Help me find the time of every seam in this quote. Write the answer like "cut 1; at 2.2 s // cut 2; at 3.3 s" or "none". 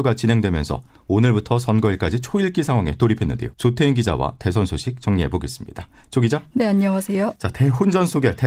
cut 1; at 3.5 s

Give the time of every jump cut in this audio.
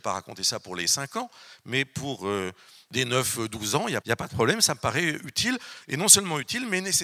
cut 1; at 4.0 s

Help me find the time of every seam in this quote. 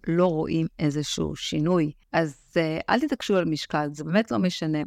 cut 1; at 2.0 s

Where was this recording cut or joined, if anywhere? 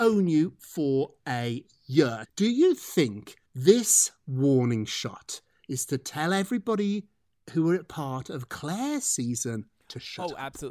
cut 1; at 2.2 s // cut 2; at 3.4 s

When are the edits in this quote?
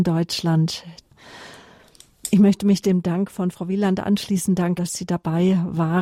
cut 1; at 4.8 s

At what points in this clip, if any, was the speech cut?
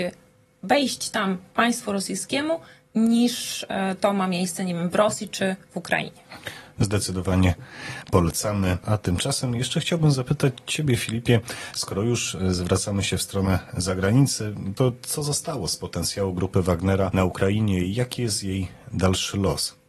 none

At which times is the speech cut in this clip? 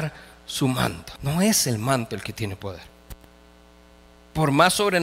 cut 1; at 1.2 s

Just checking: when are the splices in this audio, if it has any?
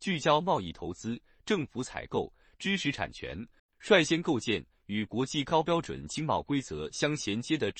cut 1; at 3.6 s

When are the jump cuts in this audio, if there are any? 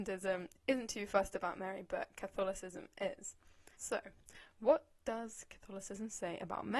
cut 1; at 3.7 s

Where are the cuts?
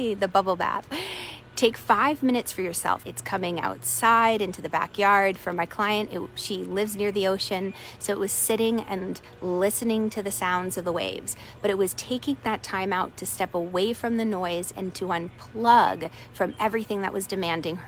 cut 1; at 3.0 s

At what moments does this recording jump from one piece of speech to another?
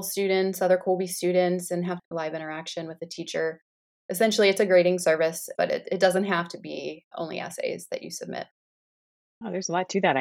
cut 1; at 3.9 s // cut 2; at 5.5 s // cut 3; at 7.1 s

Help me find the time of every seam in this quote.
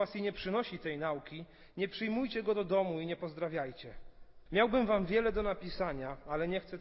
cut 1; at 4.5 s

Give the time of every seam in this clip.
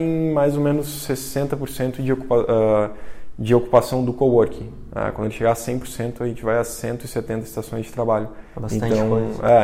none

